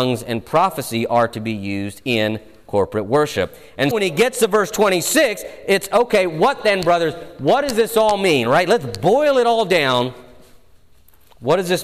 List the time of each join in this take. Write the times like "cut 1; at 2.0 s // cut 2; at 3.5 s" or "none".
cut 1; at 3.9 s